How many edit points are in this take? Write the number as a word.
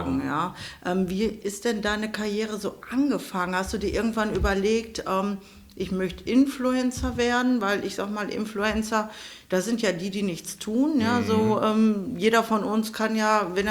zero